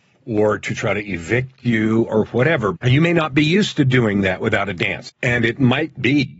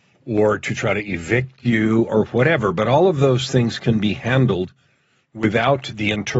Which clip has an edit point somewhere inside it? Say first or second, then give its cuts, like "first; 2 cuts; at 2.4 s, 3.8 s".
first; 2 cuts; at 2.7 s, 5.1 s